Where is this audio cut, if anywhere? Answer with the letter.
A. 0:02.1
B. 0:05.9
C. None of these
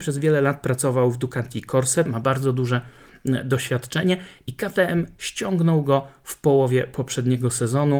A